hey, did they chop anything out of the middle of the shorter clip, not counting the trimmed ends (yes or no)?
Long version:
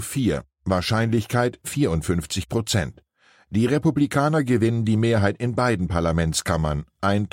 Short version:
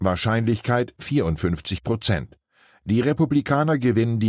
no